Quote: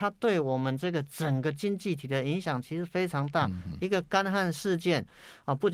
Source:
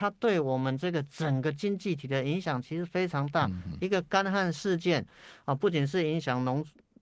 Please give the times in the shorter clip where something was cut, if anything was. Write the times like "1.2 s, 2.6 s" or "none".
none